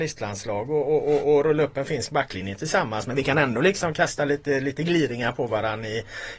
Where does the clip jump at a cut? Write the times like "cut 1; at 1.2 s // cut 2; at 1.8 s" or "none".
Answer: none